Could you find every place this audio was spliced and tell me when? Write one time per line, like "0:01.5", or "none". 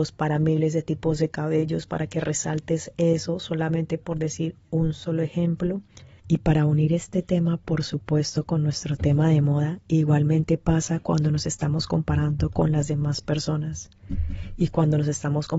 0:06.2